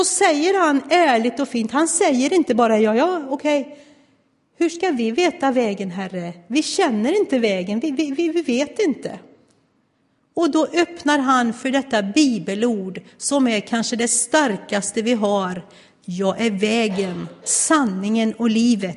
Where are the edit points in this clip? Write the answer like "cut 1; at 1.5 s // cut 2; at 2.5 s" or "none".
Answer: none